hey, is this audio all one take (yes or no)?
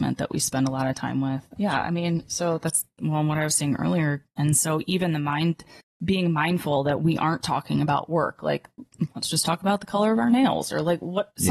no